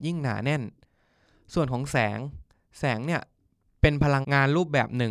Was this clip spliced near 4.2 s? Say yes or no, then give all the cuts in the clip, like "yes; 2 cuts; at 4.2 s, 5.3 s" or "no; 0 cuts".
yes; 1 cut; at 4.2 s